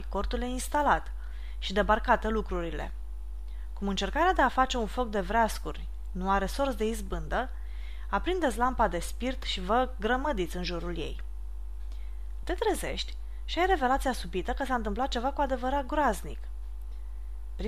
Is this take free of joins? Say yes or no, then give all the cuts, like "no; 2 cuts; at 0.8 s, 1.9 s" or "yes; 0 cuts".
no; 1 cut; at 12.4 s